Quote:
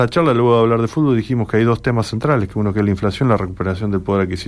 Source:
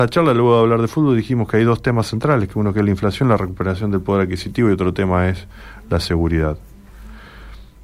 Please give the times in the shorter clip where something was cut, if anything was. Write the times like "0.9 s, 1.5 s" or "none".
none